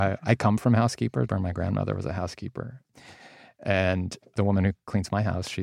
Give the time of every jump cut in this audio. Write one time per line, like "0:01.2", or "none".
0:01.3